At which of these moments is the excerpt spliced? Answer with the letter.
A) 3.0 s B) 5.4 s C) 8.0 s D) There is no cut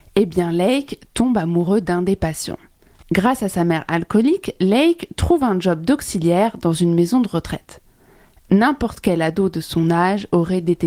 A